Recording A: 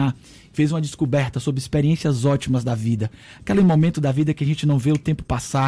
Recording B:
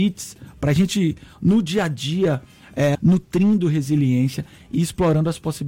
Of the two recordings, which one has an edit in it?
B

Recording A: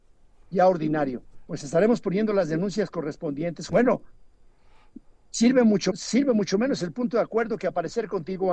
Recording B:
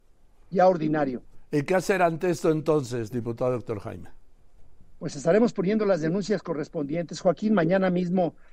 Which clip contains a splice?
A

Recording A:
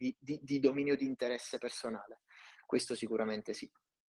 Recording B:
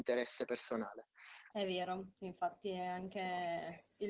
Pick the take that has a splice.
B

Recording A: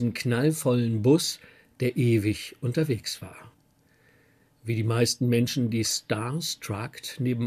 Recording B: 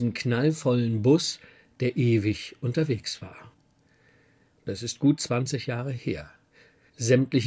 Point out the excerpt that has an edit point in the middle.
B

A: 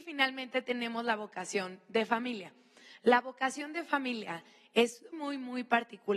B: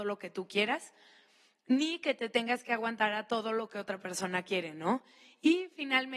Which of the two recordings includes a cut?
A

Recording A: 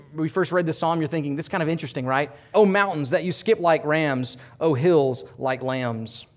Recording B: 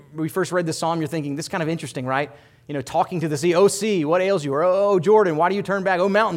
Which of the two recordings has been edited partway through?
A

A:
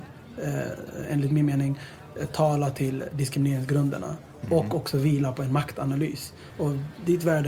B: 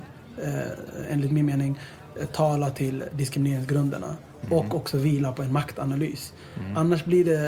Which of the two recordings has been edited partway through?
A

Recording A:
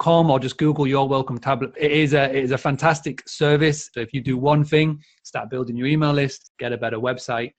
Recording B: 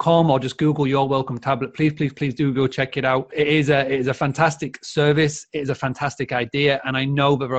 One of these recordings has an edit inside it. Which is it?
A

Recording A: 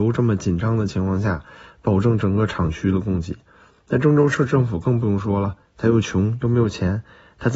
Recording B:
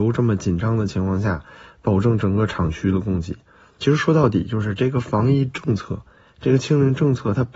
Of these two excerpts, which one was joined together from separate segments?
B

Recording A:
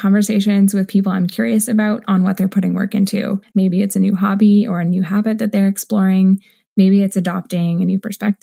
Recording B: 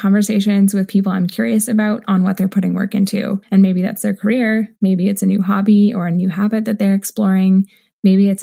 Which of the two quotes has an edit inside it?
A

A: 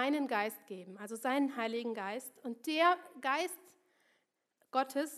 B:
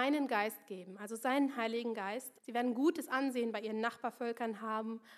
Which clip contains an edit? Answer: B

